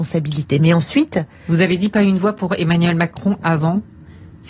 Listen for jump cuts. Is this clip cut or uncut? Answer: uncut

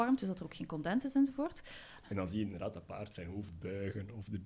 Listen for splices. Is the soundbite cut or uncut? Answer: cut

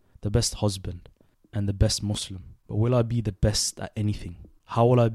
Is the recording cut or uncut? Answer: cut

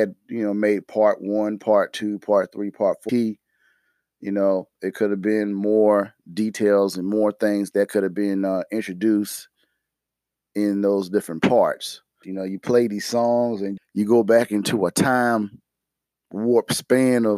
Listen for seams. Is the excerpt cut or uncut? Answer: cut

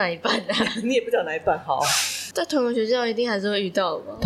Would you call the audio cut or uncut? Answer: cut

